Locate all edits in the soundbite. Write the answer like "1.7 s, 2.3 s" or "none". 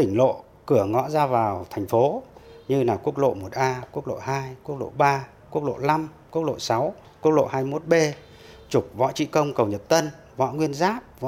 none